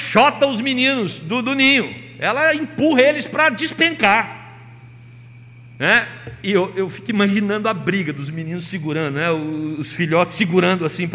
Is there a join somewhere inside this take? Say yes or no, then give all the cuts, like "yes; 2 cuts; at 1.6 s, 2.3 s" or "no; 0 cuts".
no; 0 cuts